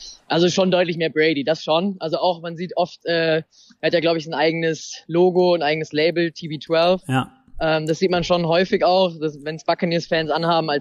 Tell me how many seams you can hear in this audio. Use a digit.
0